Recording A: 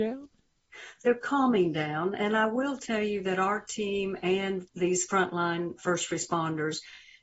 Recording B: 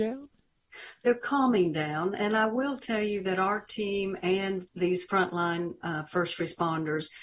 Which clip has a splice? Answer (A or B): A